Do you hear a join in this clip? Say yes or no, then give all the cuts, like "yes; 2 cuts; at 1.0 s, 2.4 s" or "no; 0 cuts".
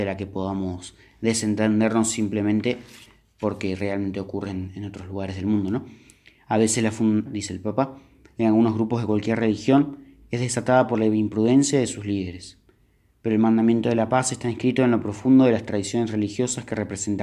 yes; 1 cut; at 7.2 s